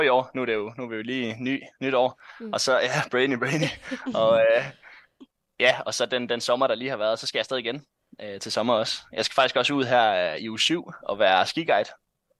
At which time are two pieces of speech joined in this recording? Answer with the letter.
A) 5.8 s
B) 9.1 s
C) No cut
C